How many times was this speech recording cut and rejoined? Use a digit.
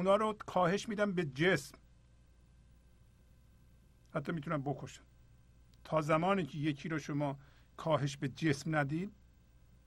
0